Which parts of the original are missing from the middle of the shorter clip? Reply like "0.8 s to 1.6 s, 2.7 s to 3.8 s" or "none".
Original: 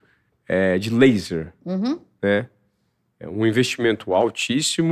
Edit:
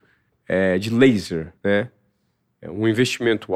1.6 s to 2.2 s